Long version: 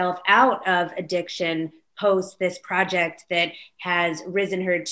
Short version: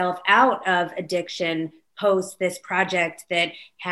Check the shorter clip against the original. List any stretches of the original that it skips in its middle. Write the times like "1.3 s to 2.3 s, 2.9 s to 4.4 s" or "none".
none